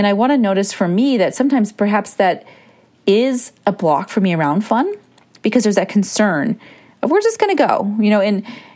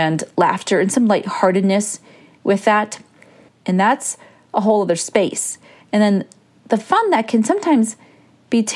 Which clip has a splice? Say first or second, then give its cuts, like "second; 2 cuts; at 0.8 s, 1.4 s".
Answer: second; 2 cuts; at 3.5 s, 5.8 s